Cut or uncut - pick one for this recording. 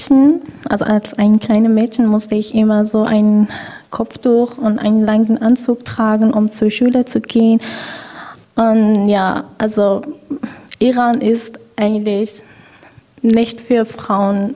cut